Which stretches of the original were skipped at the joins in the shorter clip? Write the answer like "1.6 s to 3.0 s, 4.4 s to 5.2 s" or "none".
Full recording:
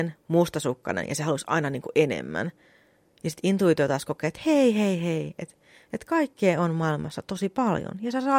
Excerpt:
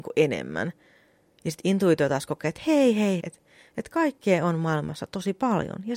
5.0 s to 5.4 s